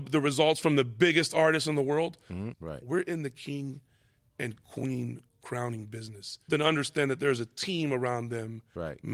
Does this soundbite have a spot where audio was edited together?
yes; 2 cuts; at 2.5 s, 6.5 s

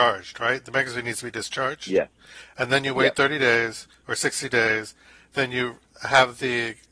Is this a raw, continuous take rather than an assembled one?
yes; 0 cuts

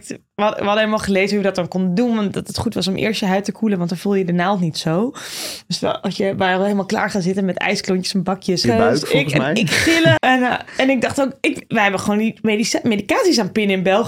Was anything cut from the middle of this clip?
yes; 2 cuts; at 8.6 s, 10.2 s

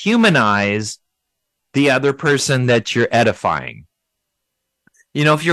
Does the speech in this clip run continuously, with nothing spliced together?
no; 1 cut; at 1.6 s

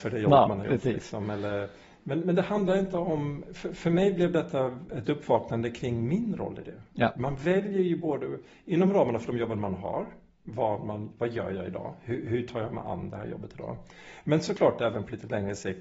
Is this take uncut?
yes; 0 cuts

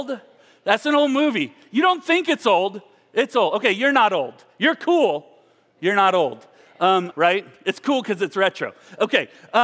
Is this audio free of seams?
no; 1 cut; at 7.1 s

